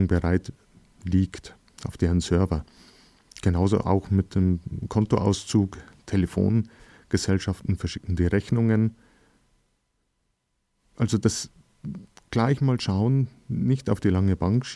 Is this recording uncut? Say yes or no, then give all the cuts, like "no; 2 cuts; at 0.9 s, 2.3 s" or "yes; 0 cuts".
yes; 0 cuts